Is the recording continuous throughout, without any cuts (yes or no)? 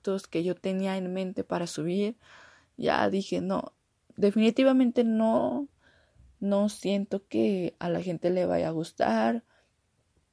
yes